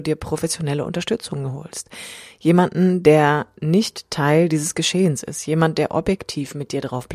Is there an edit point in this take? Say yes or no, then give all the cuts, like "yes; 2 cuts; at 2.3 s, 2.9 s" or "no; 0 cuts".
no; 0 cuts